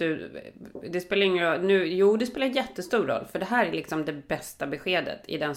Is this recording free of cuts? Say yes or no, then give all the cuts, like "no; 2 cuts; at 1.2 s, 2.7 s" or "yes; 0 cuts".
yes; 0 cuts